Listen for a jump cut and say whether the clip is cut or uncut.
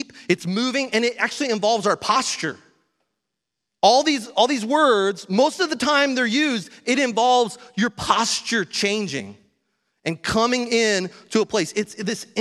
uncut